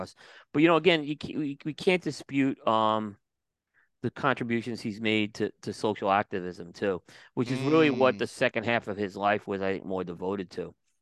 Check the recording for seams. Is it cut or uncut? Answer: uncut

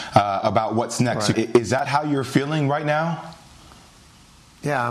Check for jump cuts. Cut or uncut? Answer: cut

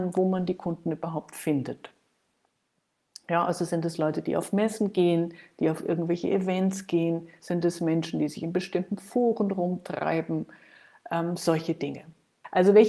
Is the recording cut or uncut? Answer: uncut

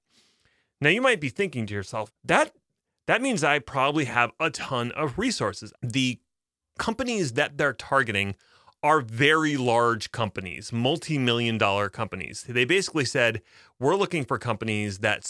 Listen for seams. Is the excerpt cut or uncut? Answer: cut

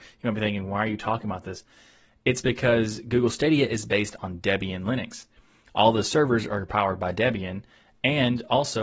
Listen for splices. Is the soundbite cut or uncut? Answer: uncut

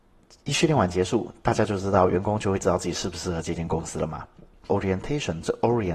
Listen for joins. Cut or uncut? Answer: cut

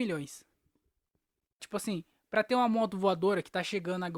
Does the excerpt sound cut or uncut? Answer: cut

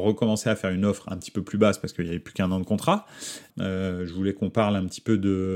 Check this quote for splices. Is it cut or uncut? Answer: cut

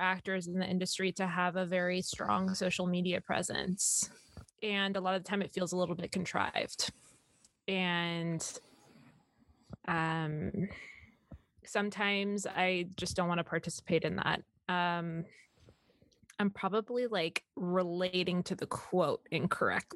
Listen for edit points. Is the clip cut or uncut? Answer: cut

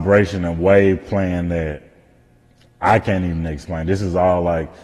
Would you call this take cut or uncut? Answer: uncut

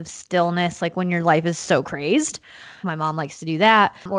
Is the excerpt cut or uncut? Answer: cut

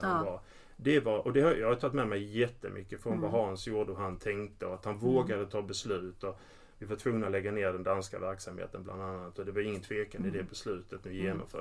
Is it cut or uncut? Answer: uncut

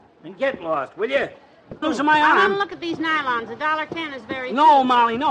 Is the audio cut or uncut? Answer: cut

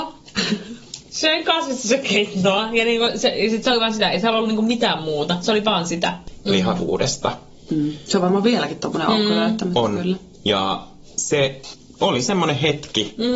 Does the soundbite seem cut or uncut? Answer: cut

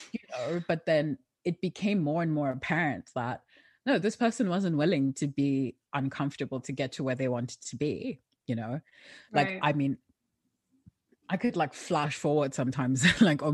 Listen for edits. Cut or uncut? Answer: uncut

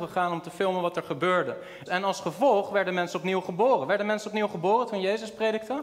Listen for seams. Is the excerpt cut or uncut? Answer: cut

